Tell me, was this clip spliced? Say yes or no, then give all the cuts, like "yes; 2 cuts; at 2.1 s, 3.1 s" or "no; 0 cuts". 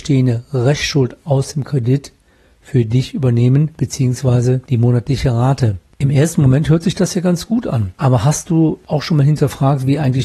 no; 0 cuts